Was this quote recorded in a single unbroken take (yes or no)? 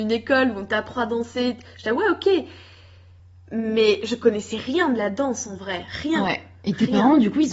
yes